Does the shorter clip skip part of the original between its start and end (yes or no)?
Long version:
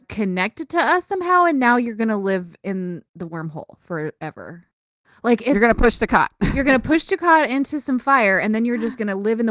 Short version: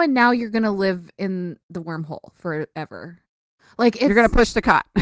no